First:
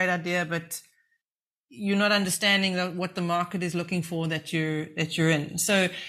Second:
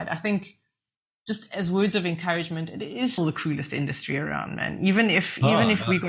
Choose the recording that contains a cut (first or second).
second